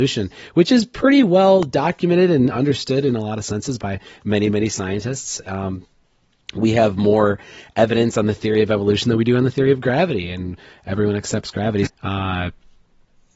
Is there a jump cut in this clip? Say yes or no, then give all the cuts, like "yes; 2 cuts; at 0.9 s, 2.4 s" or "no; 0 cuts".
yes; 1 cut; at 11.9 s